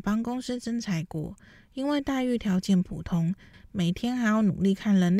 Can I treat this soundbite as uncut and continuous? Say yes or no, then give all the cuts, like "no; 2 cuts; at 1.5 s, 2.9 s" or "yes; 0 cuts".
yes; 0 cuts